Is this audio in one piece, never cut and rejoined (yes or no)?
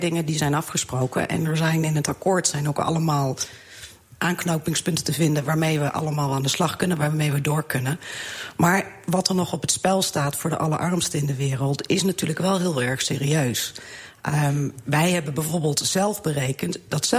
yes